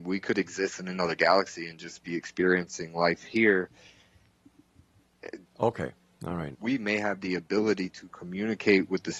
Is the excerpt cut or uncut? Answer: cut